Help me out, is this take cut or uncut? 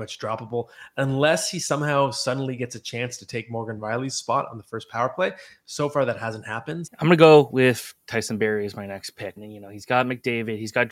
cut